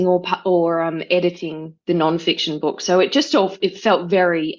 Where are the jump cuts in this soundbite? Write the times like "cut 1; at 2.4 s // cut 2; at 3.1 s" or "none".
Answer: none